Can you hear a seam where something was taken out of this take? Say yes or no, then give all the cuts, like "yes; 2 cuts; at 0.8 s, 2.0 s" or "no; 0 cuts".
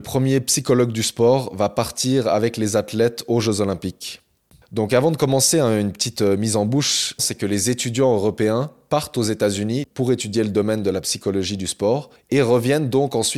yes; 2 cuts; at 4.6 s, 7.2 s